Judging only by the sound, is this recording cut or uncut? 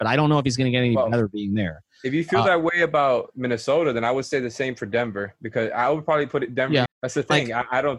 cut